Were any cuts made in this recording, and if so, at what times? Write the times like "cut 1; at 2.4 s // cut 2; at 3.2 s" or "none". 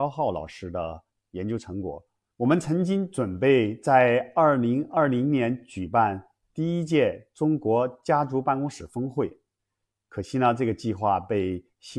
cut 1; at 2.3 s